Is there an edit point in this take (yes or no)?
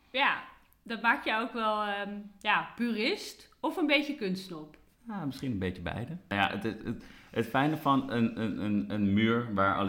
no